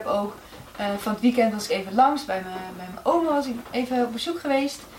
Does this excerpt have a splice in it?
no; 0 cuts

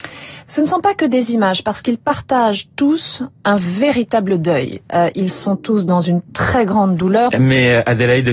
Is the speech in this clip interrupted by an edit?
yes; 3 cuts; at 3.4 s, 4.9 s, 7.3 s

